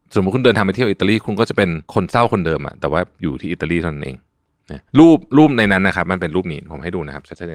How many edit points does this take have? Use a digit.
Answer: 2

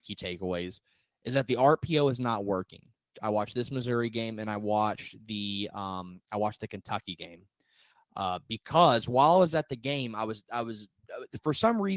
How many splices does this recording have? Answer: 1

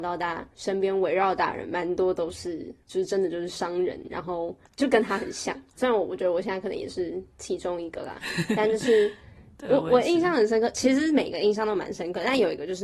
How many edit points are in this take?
1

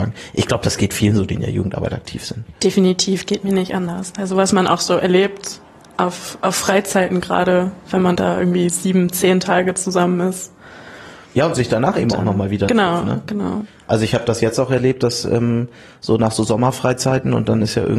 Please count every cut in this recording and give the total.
0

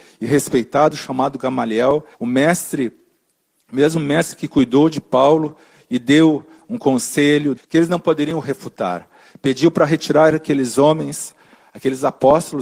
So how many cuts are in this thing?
2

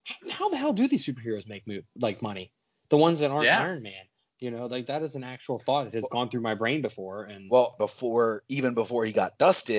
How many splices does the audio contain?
1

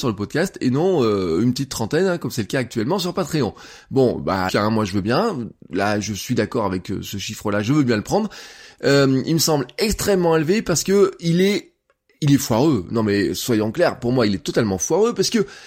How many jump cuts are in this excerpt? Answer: 1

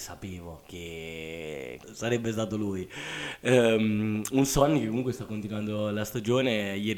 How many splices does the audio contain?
1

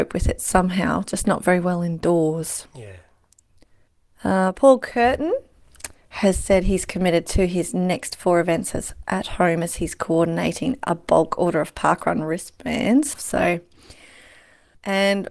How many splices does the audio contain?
1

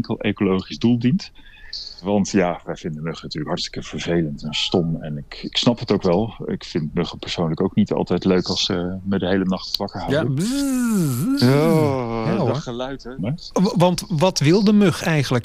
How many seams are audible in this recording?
1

